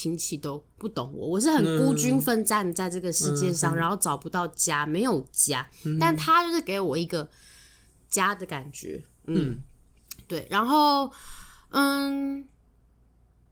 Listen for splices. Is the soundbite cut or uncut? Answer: uncut